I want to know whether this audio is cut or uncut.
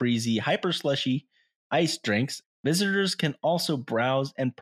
cut